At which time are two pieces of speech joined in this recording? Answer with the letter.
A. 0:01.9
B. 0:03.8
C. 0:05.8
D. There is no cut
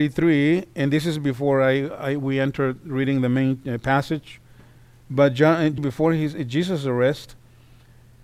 C